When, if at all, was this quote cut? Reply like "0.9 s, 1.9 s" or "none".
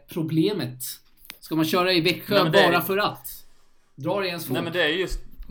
none